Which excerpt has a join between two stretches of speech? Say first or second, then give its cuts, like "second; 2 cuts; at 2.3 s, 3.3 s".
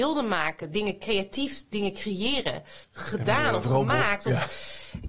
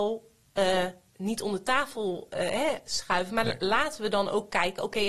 first; 1 cut; at 2.8 s